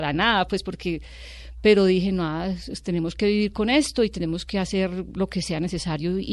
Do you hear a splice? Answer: no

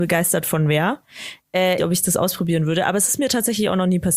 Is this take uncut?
no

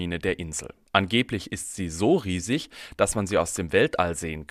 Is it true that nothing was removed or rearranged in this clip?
yes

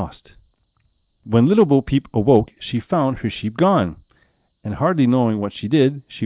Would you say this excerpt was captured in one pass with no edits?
yes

